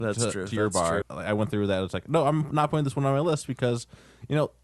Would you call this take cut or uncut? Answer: cut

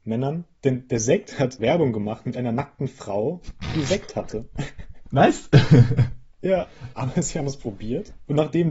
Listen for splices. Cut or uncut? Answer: cut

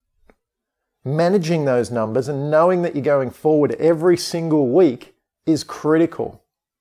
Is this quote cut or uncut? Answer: cut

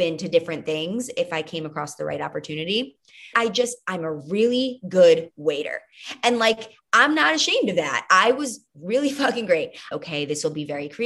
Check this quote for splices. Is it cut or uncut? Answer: cut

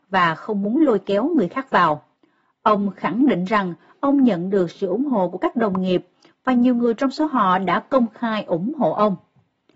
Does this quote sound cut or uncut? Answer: uncut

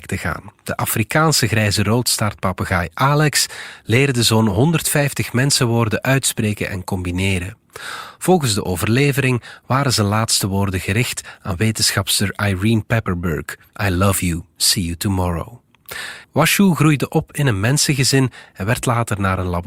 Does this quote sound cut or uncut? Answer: cut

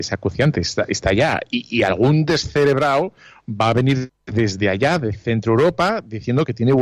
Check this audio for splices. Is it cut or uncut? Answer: uncut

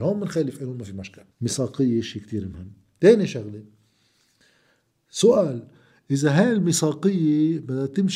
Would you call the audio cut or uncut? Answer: cut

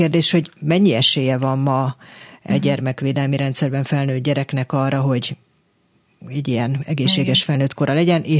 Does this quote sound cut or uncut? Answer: uncut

